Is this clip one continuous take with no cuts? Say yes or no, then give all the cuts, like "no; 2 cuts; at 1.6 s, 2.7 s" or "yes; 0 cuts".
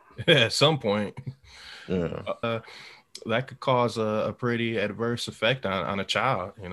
no; 1 cut; at 2.4 s